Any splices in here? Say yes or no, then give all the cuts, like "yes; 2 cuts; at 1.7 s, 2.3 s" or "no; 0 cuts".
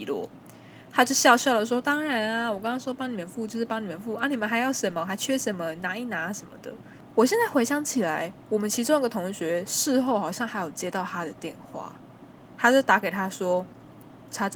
no; 0 cuts